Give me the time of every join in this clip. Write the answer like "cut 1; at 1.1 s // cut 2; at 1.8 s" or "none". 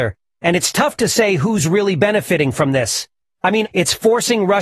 cut 1; at 3.6 s